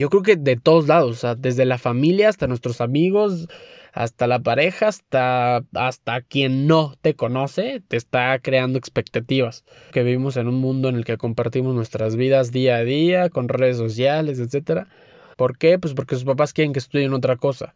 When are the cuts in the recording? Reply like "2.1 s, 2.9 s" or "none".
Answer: 9.9 s, 15.3 s